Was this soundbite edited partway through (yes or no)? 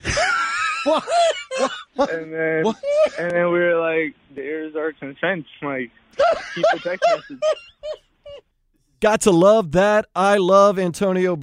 yes